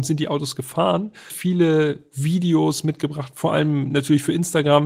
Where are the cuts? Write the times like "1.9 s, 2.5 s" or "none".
1.3 s